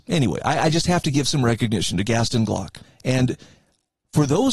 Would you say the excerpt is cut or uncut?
cut